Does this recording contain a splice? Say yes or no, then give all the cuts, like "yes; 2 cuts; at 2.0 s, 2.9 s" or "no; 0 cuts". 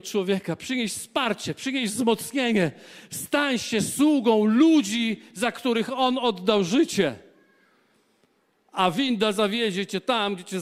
no; 0 cuts